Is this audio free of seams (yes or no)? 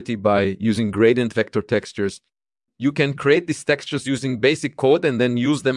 yes